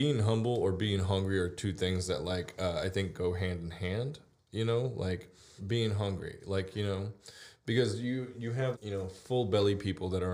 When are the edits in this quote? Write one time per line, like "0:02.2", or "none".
0:05.6
0:08.7